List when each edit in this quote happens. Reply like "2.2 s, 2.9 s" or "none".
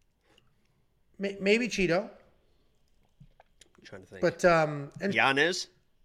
5.1 s